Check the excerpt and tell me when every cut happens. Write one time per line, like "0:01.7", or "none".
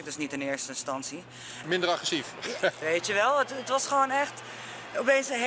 0:01.6
0:02.8